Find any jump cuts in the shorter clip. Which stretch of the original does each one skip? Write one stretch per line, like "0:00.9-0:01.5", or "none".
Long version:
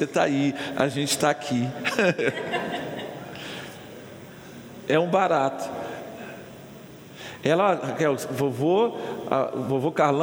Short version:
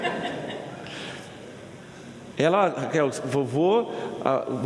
0:04.8-0:07.4

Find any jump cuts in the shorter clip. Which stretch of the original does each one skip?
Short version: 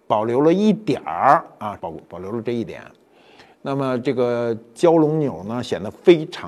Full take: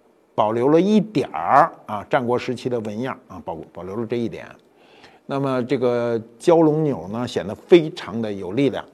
0:02.1-0:03.4

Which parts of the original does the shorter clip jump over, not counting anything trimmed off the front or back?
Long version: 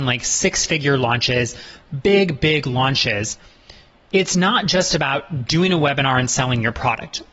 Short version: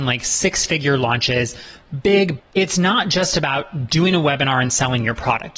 0:02.4-0:04.0

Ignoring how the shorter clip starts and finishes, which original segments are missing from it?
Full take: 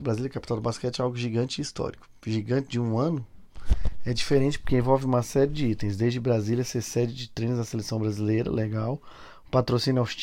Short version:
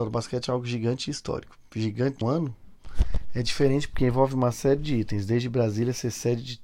0:02.7-0:02.9

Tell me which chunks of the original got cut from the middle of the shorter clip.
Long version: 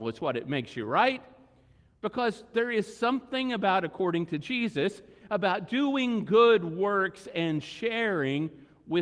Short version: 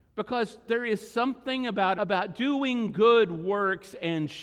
0:03.8-0:05.3

